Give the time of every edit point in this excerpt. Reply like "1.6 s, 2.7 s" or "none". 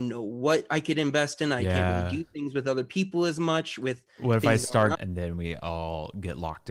4.9 s